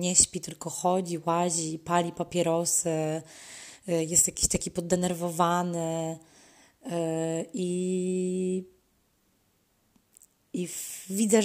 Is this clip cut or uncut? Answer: uncut